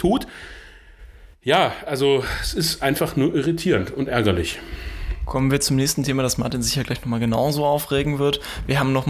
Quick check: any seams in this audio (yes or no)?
no